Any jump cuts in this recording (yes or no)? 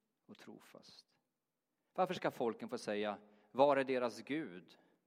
no